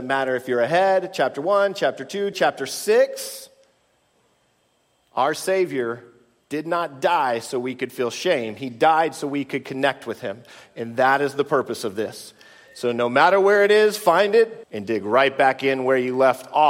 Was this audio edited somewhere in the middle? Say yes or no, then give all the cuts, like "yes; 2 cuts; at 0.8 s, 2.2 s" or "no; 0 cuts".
yes; 2 cuts; at 2.3 s, 14.6 s